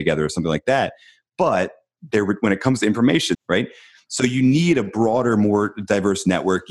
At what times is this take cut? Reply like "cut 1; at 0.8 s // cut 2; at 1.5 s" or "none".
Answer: cut 1; at 3.3 s